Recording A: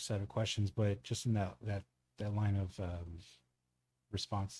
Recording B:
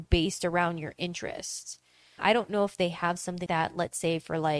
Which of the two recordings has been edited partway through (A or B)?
B